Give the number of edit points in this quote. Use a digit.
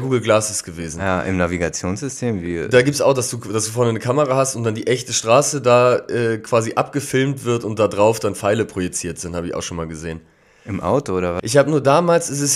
1